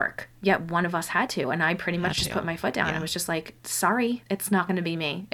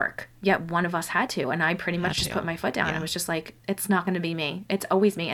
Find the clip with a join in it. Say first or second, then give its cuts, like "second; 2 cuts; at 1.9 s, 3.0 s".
second; 1 cut; at 3.6 s